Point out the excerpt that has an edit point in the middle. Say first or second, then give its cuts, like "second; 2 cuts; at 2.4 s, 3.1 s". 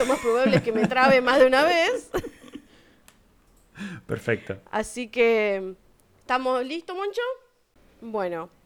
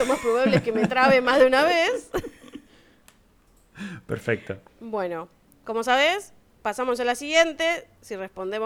second; 2 cuts; at 4.7 s, 6.5 s